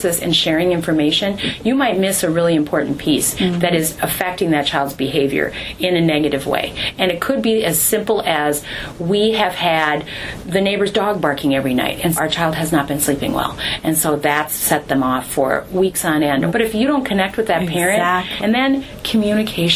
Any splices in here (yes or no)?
yes